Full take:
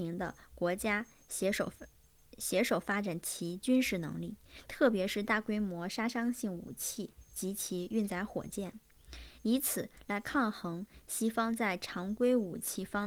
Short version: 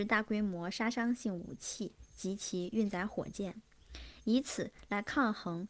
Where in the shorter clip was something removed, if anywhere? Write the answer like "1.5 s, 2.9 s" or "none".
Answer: none